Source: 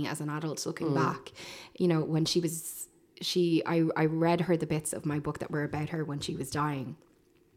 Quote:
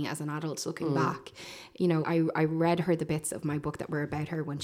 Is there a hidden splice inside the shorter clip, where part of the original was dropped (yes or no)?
yes